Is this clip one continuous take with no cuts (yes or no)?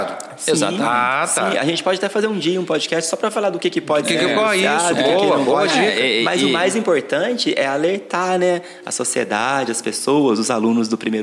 yes